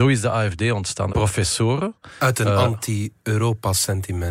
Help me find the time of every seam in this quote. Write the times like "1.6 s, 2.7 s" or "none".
1.1 s